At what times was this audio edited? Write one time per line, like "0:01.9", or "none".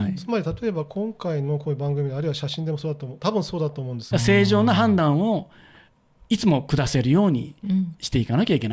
0:04.1